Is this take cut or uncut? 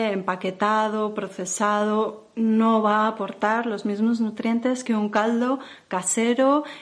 uncut